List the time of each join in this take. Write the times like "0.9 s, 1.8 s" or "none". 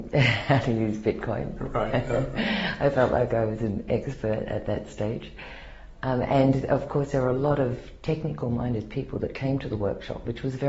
none